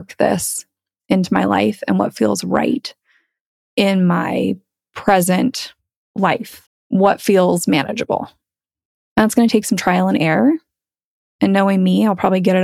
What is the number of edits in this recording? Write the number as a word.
one